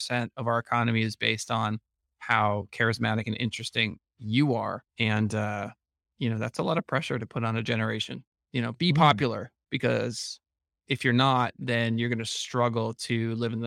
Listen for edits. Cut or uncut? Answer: uncut